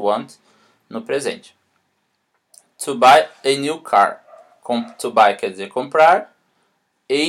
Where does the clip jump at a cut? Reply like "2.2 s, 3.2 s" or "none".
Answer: none